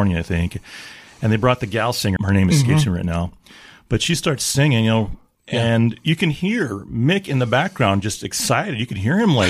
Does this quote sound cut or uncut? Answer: cut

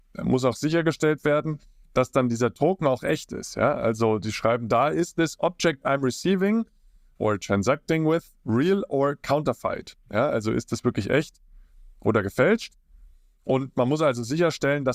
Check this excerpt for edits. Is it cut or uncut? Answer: uncut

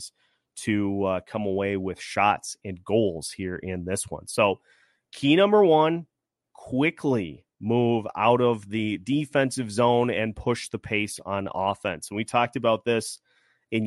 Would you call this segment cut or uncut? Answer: uncut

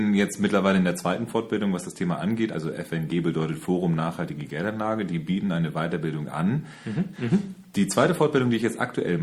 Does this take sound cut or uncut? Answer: cut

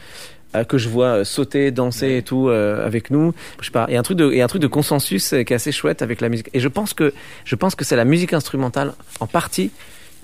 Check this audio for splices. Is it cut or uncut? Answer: cut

